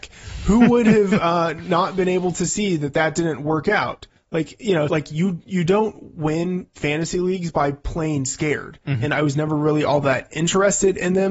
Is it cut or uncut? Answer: cut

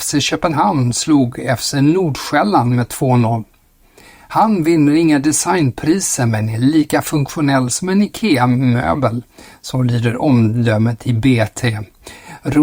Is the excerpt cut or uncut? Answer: uncut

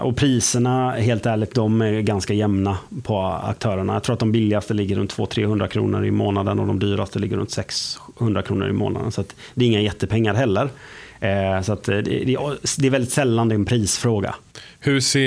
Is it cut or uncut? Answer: uncut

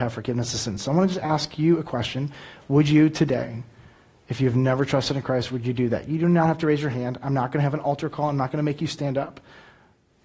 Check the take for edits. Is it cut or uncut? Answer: uncut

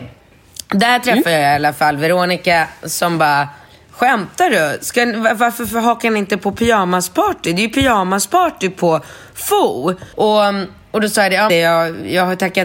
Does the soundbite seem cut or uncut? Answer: cut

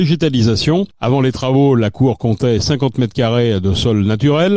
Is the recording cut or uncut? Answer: uncut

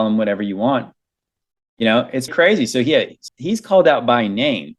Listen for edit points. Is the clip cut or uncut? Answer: cut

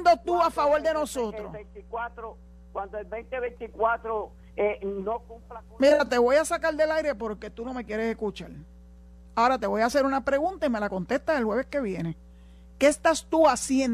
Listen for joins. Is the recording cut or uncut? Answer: uncut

